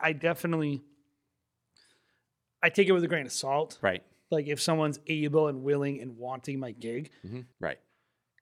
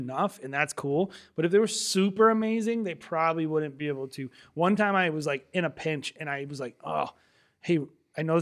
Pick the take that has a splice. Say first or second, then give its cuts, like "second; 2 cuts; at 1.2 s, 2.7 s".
first; 1 cut; at 7.5 s